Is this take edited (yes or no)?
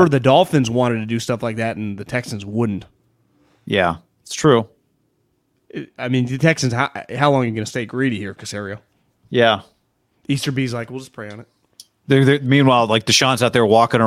no